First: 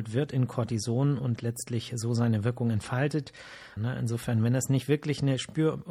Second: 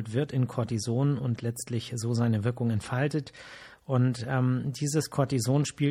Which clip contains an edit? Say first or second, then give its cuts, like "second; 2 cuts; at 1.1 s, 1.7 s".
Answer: first; 1 cut; at 3.8 s